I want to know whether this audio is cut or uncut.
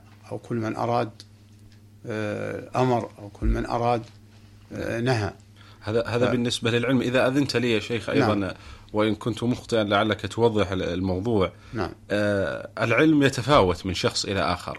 uncut